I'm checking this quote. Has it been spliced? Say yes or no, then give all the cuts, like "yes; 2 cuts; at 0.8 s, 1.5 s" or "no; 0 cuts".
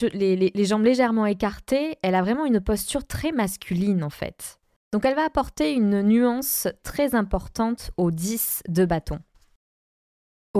no; 0 cuts